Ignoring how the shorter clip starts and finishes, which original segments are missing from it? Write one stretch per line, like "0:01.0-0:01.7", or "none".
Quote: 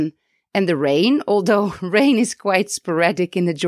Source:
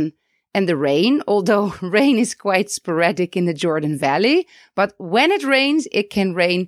none